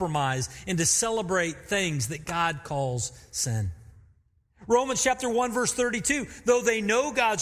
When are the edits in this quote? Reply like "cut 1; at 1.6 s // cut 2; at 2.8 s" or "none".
cut 1; at 4.5 s